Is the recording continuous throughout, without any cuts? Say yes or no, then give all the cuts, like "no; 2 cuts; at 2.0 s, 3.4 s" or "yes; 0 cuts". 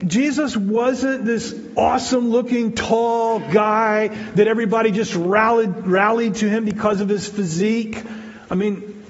yes; 0 cuts